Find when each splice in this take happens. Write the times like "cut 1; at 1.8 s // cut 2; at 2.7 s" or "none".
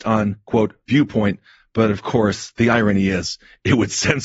none